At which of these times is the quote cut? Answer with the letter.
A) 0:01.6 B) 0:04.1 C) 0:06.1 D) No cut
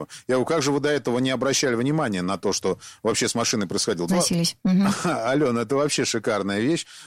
B